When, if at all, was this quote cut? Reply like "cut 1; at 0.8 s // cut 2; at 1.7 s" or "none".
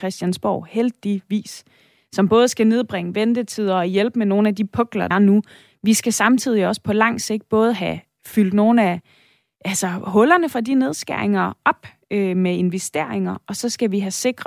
cut 1; at 5.1 s

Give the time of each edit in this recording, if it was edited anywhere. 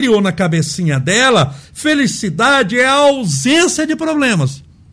none

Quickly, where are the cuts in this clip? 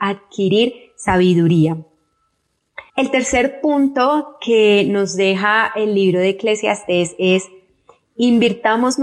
cut 1; at 2.9 s

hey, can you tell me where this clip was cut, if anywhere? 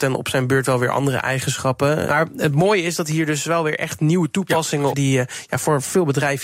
cut 1; at 2.1 s // cut 2; at 4.9 s

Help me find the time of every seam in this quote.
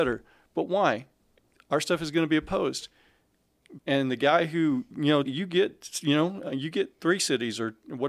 cut 1; at 3.8 s // cut 2; at 5.2 s

